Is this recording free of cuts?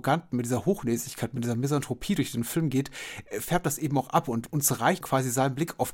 no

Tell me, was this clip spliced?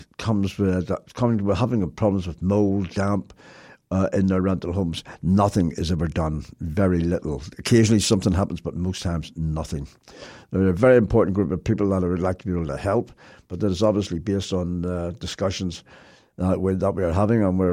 no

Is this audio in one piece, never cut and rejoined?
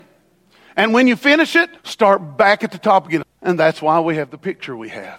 no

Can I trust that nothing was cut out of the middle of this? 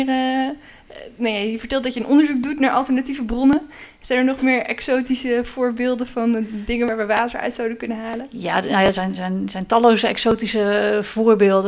yes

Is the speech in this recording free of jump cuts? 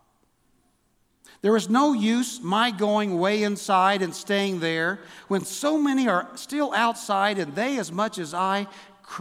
yes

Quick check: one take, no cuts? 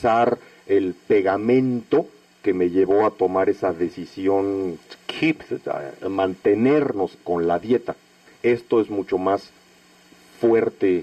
yes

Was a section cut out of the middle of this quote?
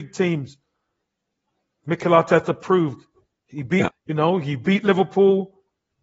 yes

